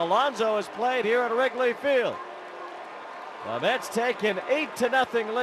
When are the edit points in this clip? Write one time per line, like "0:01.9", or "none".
none